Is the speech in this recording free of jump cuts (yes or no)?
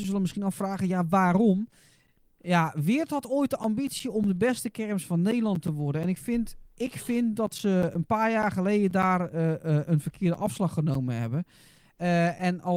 yes